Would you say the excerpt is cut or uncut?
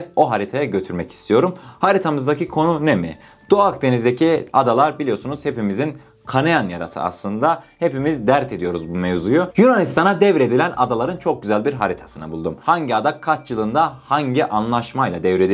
uncut